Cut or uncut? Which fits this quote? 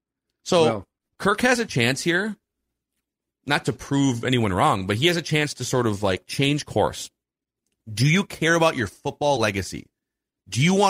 uncut